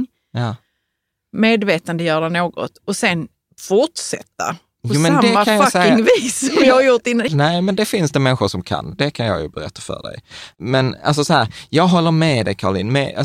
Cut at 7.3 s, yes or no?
yes